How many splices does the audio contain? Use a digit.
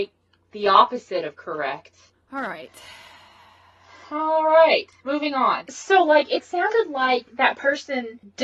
1